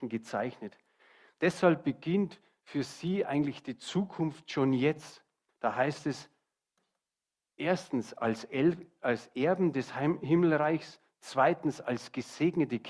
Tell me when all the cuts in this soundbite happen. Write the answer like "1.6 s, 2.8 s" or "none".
5.5 s

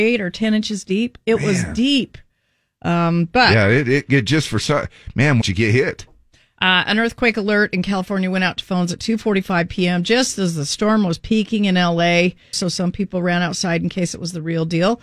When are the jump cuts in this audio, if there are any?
5.4 s, 12.5 s

